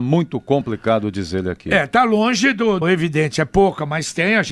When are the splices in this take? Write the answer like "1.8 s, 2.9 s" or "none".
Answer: 2.8 s

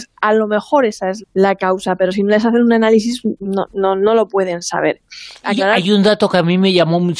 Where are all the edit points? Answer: 1.2 s, 5.4 s

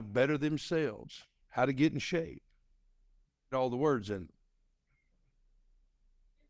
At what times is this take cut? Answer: 1.4 s, 3.5 s

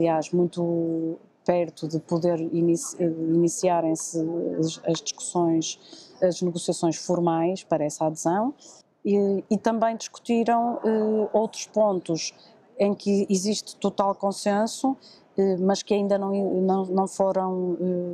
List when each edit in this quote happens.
none

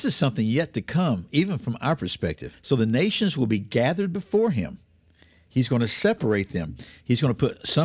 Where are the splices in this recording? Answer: 2.5 s

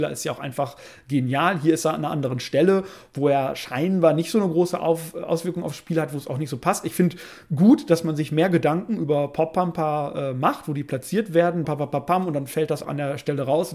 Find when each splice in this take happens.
11.6 s, 12.8 s

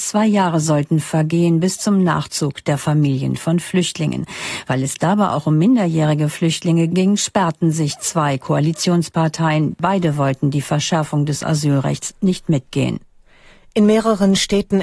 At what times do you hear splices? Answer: none

